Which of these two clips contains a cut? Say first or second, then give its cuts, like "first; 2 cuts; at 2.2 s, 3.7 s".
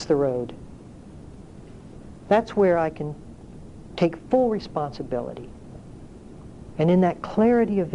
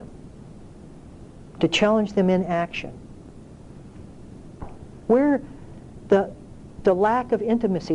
second; 1 cut; at 5.1 s